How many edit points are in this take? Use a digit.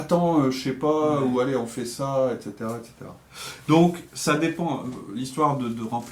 0